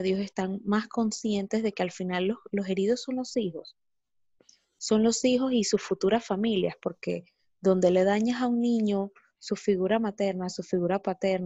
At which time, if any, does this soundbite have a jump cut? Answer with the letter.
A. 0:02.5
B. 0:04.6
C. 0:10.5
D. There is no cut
D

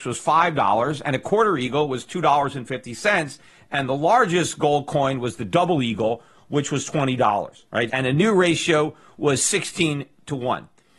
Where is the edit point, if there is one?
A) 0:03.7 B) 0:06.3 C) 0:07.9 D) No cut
C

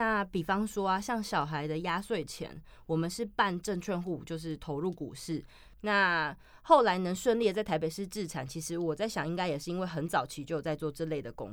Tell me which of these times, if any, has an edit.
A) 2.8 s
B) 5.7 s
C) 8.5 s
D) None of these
B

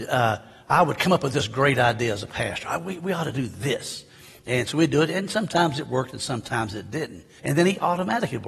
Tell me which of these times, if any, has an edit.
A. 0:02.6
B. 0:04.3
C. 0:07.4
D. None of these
C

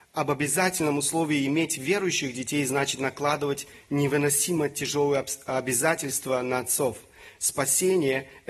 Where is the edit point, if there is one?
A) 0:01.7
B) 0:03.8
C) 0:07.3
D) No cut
D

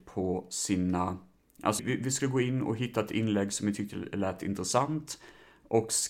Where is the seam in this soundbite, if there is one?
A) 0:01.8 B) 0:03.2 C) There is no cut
A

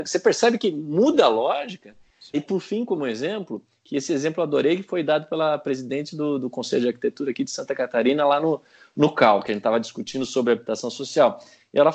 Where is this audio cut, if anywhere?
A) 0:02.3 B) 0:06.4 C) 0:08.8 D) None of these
A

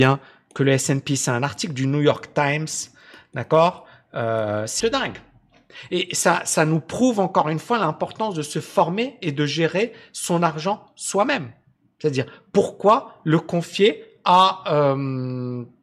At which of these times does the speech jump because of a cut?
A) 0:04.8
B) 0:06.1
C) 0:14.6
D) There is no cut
A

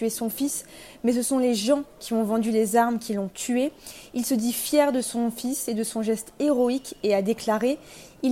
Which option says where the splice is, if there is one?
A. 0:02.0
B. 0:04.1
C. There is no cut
C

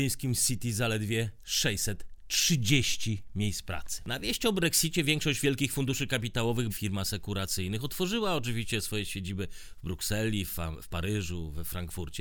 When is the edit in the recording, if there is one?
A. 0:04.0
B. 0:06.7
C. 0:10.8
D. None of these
B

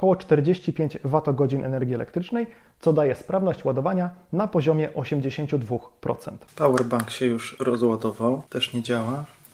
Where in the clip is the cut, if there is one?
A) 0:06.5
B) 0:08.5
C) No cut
C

